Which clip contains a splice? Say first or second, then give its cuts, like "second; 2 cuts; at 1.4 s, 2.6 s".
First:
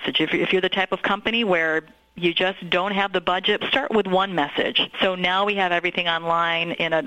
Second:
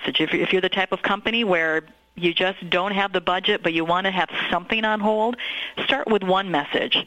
first; 2 cuts; at 3.6 s, 4.9 s